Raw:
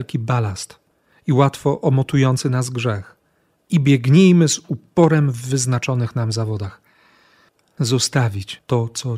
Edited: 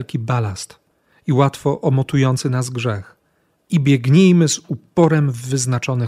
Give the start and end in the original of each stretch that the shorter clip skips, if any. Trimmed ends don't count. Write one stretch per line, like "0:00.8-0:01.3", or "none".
none